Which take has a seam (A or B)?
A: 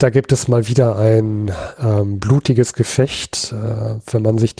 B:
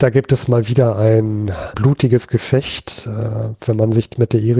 B